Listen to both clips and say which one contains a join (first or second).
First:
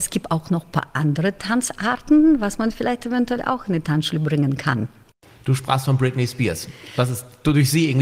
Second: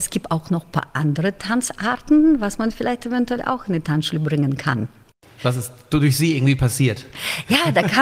second